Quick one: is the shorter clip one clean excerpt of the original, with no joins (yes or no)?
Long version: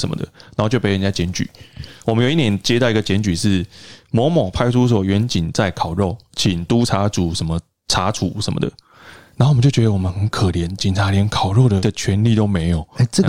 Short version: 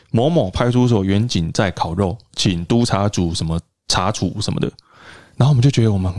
yes